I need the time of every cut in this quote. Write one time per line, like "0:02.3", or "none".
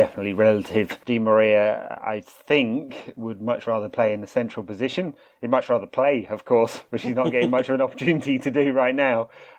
none